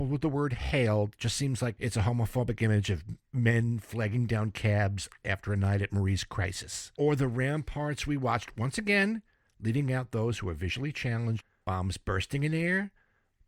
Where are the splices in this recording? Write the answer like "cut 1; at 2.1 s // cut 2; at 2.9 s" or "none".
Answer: none